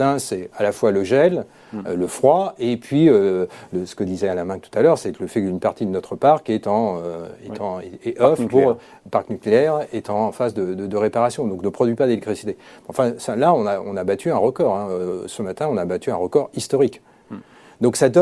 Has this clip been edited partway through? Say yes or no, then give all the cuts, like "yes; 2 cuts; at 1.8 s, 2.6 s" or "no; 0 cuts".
no; 0 cuts